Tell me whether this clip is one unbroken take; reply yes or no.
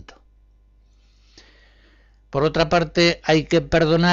yes